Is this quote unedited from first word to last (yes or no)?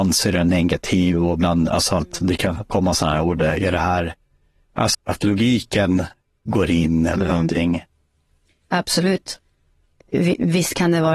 no